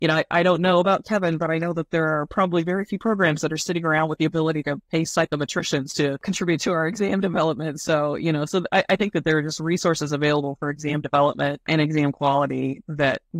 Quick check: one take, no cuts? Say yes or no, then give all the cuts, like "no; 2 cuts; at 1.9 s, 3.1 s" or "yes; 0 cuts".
yes; 0 cuts